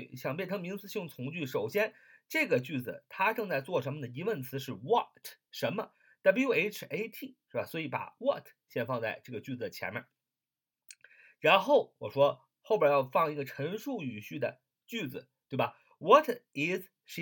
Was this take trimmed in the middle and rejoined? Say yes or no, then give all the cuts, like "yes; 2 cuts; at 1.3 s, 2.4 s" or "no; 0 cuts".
no; 0 cuts